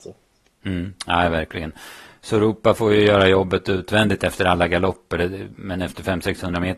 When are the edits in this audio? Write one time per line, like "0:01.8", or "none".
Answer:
none